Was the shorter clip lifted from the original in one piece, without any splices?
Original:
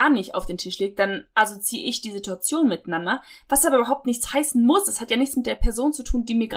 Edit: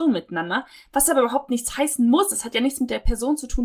yes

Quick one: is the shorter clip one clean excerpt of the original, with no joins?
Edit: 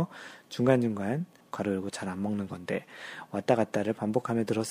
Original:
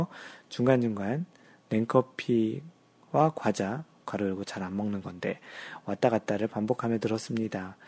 no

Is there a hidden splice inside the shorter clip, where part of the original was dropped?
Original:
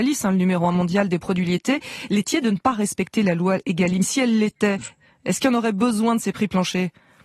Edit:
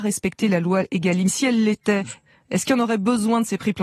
no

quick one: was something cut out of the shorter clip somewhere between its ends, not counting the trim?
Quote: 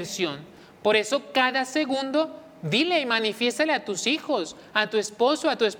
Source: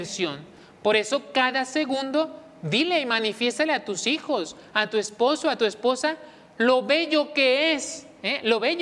no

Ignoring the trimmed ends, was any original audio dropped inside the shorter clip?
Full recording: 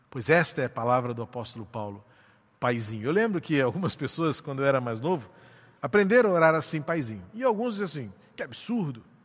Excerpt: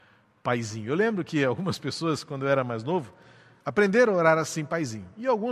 no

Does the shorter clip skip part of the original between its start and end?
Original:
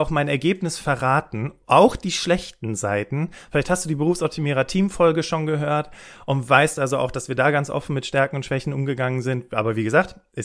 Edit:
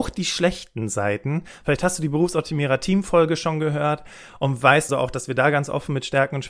yes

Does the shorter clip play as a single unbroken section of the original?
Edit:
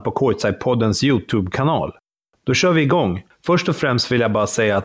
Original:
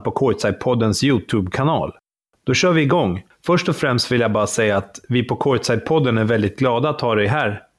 yes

